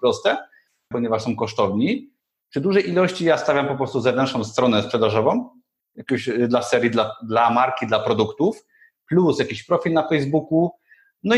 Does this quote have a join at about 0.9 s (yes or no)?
yes